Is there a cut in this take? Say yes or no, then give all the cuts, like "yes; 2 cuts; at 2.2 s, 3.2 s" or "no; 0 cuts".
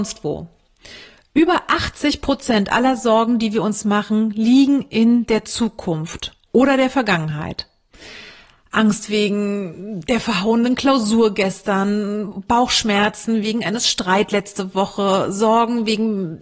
no; 0 cuts